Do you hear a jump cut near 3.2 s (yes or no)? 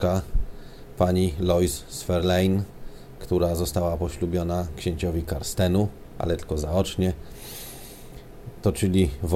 no